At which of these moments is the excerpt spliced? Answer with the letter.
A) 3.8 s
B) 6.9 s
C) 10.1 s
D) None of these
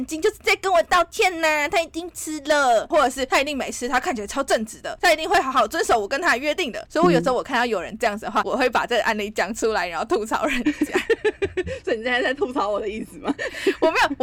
B